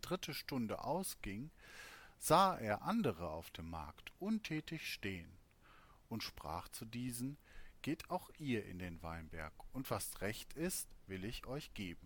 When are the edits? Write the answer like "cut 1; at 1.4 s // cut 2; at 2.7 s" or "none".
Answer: none